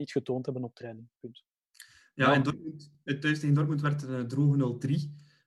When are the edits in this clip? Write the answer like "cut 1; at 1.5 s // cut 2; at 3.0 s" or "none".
none